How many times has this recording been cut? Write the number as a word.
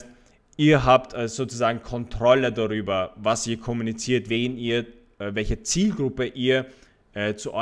one